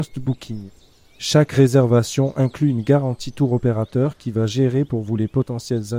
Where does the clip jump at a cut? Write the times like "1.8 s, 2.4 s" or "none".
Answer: none

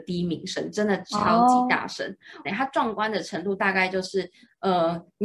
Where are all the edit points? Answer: 2.4 s

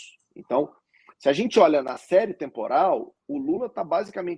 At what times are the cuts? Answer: 1.8 s

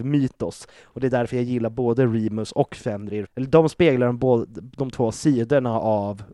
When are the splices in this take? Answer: 3.3 s

